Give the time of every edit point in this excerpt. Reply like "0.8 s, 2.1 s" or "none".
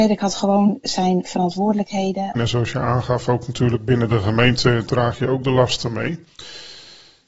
2.4 s